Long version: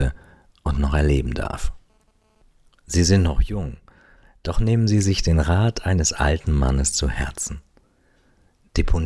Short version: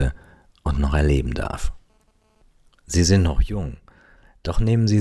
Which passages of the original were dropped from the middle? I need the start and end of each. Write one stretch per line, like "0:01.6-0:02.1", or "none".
none